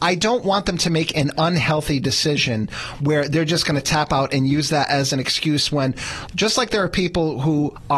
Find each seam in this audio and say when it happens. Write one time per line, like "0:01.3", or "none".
0:06.3